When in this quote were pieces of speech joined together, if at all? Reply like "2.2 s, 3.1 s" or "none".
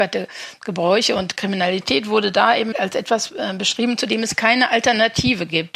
2.7 s